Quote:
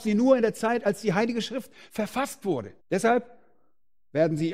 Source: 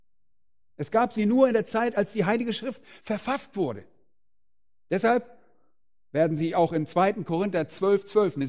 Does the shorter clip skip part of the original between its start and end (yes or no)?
yes